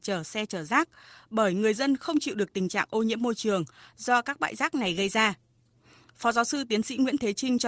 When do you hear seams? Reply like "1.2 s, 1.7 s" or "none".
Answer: none